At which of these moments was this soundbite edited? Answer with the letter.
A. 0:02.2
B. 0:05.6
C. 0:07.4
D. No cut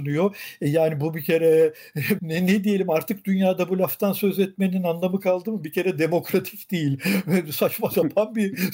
A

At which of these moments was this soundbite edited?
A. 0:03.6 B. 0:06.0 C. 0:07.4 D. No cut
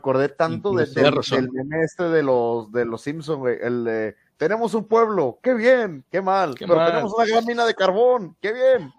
B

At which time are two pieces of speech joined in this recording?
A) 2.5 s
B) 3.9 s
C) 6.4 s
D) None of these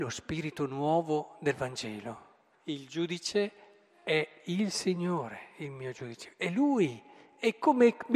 A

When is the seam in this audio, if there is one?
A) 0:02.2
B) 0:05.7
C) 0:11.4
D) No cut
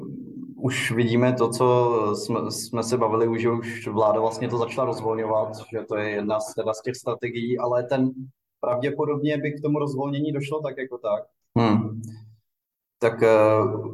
C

